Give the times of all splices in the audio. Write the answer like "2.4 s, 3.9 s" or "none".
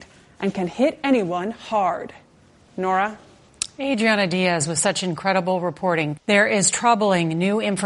6.2 s